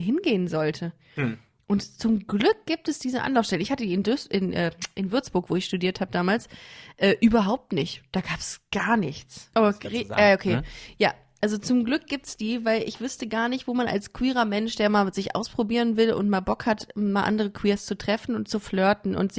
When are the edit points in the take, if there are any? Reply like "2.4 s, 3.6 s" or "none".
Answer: 9.5 s